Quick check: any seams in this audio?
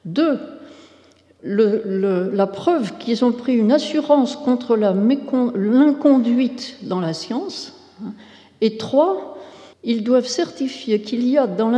yes; 2 cuts; at 1.4 s, 9.7 s

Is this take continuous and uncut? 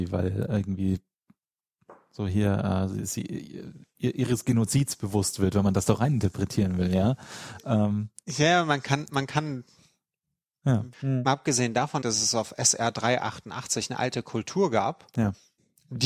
no; 2 cuts; at 10.9 s, 12.0 s

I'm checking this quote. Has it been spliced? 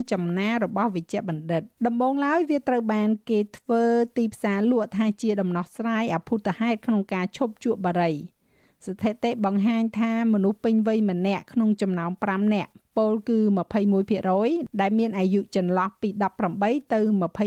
yes; 1 cut; at 1.7 s

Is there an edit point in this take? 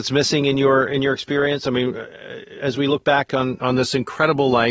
no; 0 cuts

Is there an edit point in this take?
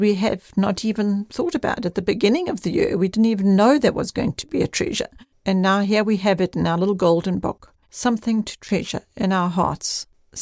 yes; 2 cuts; at 5.3 s, 7.8 s

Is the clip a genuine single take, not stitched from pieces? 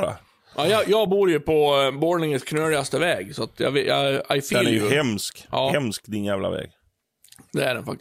yes; 0 cuts

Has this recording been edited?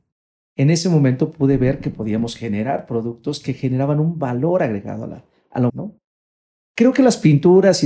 yes; 1 cut; at 5.7 s

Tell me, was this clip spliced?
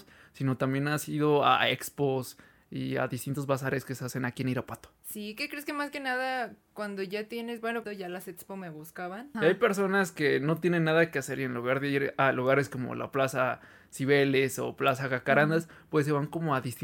yes; 2 cuts; at 7.8 s, 9.3 s

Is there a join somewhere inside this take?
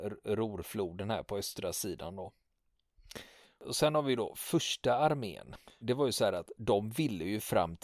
yes; 1 cut; at 5.8 s

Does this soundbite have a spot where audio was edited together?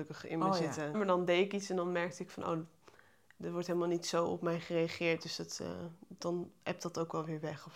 yes; 1 cut; at 0.9 s

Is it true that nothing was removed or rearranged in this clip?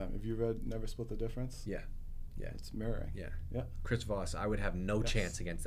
yes; 0 cuts

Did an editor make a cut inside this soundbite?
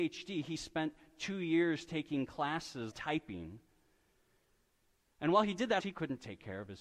yes; 2 cuts; at 2.9 s, 5.8 s

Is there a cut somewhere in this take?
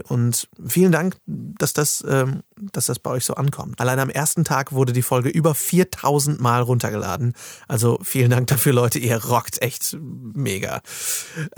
yes; 1 cut; at 3.8 s

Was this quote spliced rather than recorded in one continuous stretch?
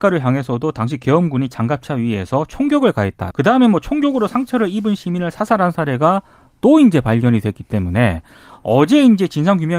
yes; 1 cut; at 3.3 s

